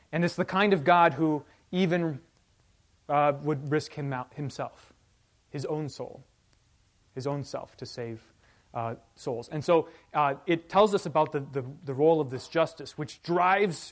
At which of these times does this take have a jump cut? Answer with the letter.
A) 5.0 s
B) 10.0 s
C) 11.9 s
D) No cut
D